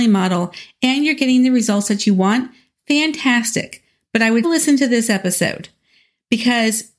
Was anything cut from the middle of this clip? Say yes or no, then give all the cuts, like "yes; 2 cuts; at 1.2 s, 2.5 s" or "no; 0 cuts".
yes; 1 cut; at 4.4 s